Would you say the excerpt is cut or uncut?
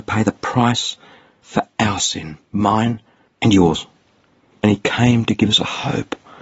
uncut